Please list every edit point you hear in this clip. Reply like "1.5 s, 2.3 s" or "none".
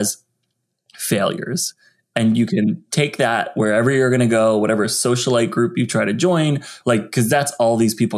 6.8 s